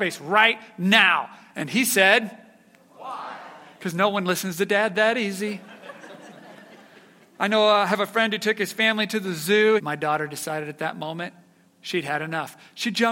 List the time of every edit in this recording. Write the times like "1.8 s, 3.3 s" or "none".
9.8 s